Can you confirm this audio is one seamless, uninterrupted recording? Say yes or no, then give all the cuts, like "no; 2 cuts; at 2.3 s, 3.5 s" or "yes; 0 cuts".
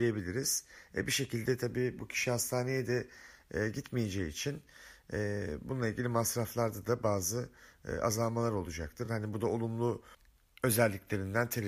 yes; 0 cuts